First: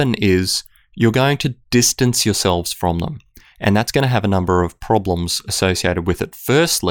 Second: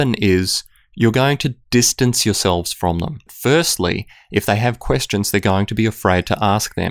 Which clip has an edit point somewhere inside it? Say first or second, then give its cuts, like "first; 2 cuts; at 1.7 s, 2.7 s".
second; 1 cut; at 3.3 s